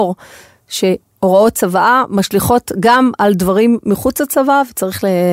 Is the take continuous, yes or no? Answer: yes